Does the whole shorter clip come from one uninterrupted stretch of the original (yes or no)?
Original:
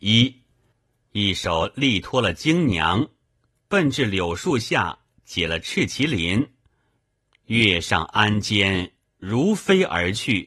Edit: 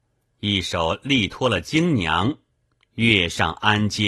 no